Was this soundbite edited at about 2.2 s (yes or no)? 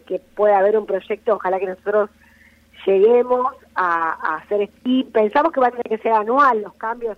no